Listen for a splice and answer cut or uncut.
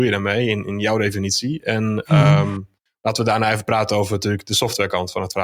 uncut